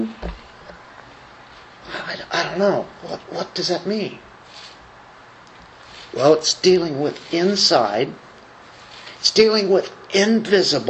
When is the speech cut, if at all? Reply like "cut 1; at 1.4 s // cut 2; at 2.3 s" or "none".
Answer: none

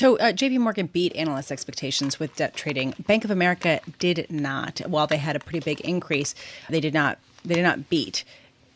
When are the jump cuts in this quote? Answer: cut 1; at 6.7 s

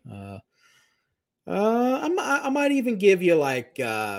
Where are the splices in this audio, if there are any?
none

